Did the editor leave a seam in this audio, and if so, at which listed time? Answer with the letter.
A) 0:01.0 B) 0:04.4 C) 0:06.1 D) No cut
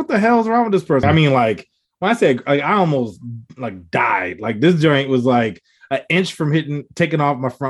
A